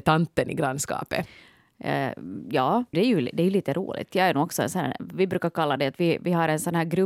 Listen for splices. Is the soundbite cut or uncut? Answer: cut